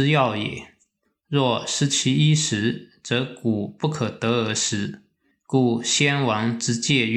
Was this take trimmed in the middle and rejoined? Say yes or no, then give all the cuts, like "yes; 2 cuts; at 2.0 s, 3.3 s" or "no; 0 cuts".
no; 0 cuts